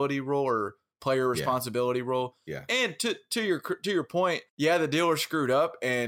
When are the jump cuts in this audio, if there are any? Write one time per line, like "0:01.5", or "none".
0:04.5